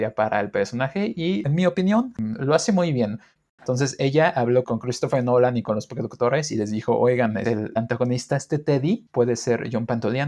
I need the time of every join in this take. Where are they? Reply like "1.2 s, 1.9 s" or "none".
3.6 s